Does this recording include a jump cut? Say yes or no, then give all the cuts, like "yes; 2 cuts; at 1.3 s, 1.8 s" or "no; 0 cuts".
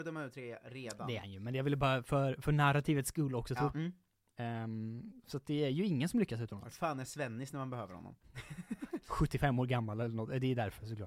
yes; 2 cuts; at 3.7 s, 8.2 s